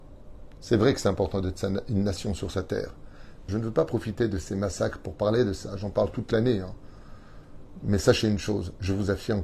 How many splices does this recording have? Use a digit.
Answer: 1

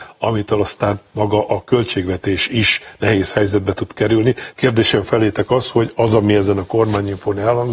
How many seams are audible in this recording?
1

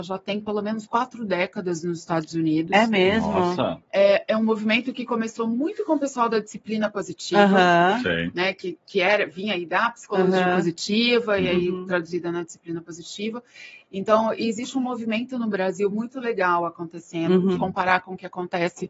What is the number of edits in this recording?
2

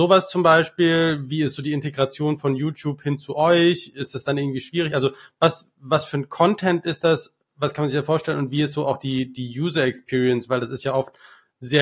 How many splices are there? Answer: 0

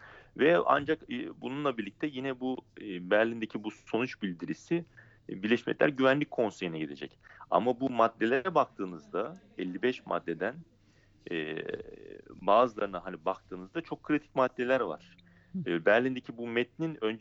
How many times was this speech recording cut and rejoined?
1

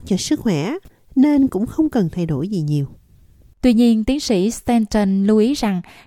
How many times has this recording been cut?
0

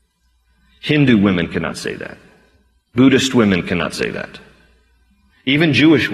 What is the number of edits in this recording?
0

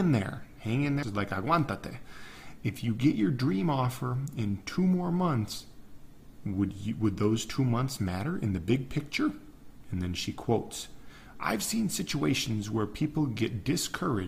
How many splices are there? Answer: 2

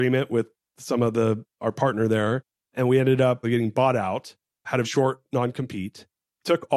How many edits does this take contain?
2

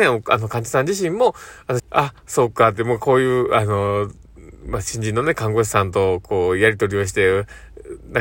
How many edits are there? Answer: 1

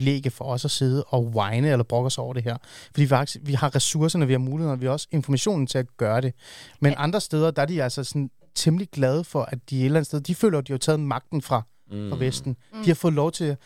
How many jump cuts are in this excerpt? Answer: 0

